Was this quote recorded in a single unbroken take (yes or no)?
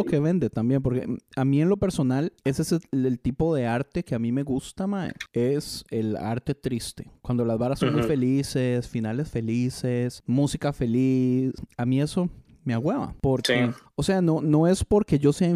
no